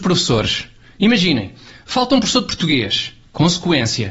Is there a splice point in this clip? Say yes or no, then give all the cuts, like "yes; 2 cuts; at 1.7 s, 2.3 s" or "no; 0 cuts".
no; 0 cuts